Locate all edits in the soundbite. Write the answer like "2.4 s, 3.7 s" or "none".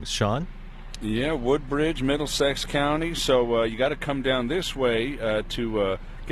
none